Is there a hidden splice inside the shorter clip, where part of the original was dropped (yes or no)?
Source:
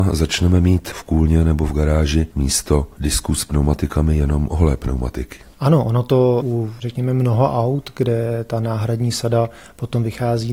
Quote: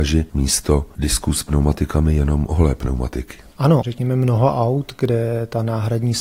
yes